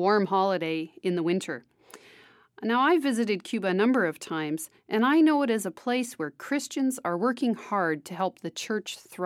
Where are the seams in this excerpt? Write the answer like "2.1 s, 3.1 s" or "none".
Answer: none